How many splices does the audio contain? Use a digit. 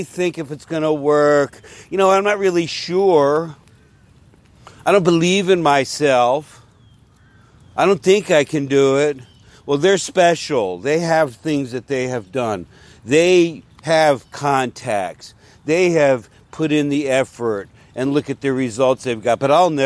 0